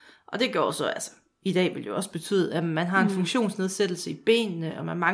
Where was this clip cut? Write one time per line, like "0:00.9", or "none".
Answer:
none